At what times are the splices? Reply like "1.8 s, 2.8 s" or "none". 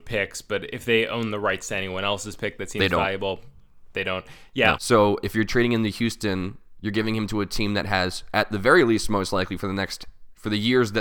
4.8 s